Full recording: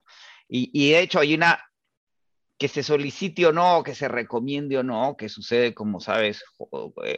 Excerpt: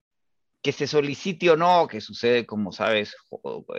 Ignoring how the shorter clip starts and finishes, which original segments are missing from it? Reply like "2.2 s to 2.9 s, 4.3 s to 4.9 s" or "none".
3.8 s to 5.2 s